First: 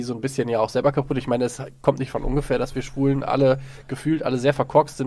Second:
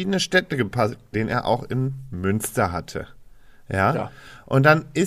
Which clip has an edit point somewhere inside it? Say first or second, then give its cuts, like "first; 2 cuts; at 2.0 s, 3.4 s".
second; 1 cut; at 1.1 s